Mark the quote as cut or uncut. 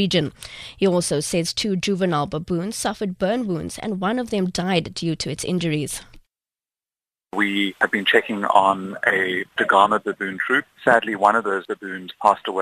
uncut